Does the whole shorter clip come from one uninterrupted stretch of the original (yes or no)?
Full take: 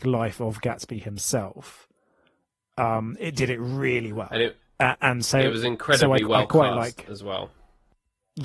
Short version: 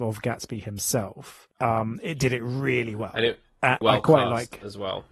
no